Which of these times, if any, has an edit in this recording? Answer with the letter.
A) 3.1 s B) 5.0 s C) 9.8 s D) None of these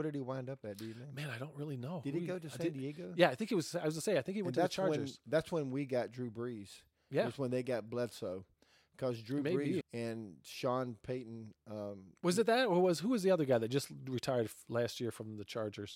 C